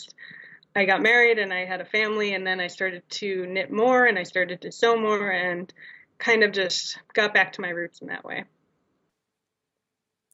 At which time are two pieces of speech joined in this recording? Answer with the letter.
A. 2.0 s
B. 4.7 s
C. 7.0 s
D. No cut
C